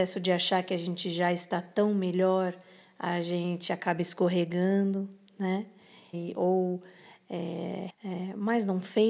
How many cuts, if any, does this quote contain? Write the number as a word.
two